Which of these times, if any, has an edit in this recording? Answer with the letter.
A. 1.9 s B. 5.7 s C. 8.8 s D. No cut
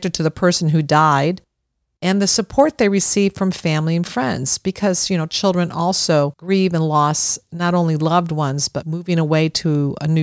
C